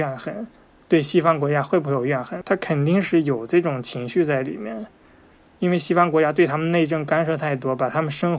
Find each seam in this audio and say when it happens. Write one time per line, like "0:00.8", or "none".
0:02.4